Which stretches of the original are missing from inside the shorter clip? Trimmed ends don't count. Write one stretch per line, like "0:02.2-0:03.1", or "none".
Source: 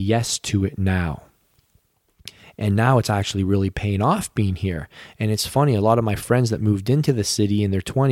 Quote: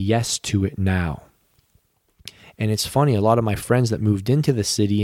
0:02.6-0:05.2